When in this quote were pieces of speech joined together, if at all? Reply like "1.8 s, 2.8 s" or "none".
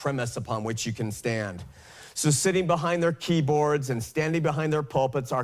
none